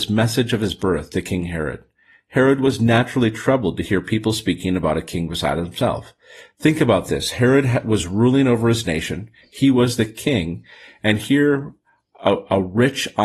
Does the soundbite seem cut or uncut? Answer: uncut